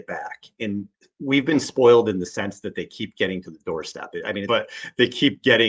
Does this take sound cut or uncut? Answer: cut